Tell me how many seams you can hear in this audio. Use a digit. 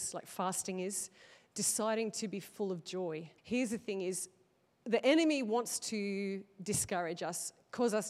1